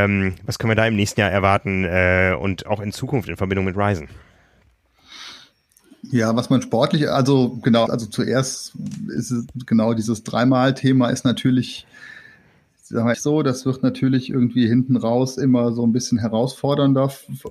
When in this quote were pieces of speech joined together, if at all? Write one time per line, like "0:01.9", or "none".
0:07.9
0:13.1